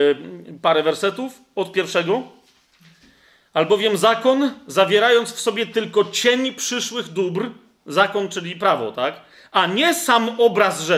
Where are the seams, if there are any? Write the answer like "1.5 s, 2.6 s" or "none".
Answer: none